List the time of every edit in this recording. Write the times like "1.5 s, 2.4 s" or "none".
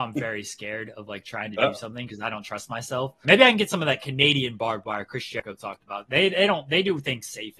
3.2 s